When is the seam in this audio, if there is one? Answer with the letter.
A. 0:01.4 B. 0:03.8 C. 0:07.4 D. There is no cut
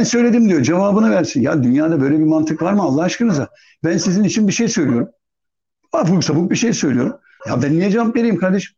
C